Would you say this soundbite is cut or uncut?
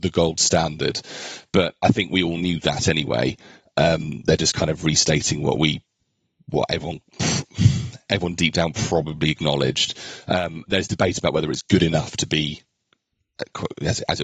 uncut